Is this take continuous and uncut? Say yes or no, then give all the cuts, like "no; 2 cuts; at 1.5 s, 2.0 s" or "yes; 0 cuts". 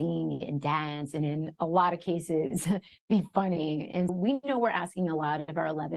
no; 1 cut; at 4.1 s